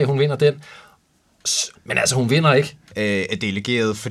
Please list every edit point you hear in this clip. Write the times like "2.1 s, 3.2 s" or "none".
1.7 s, 2.9 s